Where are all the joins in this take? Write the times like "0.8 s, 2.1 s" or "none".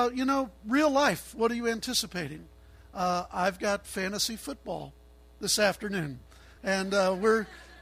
6.6 s